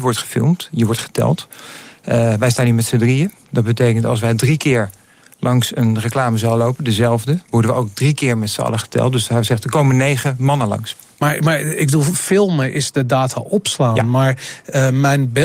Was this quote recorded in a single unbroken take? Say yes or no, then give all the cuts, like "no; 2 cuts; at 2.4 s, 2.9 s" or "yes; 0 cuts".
yes; 0 cuts